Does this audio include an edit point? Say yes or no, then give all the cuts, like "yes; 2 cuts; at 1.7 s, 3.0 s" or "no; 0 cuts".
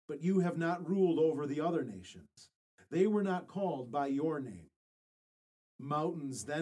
yes; 1 cut; at 5.6 s